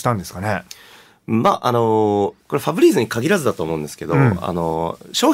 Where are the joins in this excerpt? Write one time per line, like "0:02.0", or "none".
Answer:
0:02.4